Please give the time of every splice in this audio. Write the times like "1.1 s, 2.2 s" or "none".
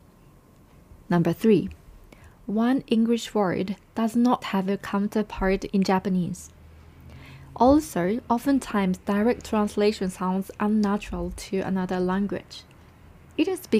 4.4 s